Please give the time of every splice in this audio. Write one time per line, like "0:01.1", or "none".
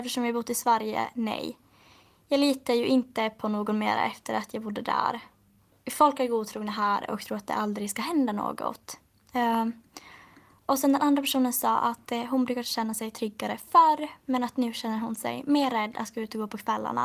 none